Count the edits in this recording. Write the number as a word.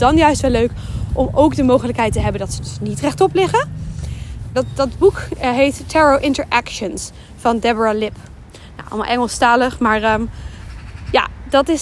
one